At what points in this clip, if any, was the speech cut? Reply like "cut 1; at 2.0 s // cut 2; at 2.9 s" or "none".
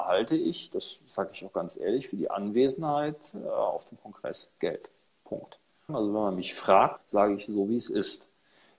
cut 1; at 5.9 s // cut 2; at 7.0 s